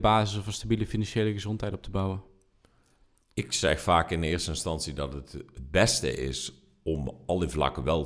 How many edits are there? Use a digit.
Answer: 0